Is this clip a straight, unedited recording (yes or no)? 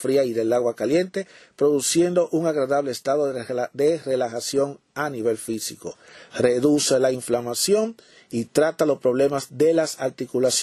yes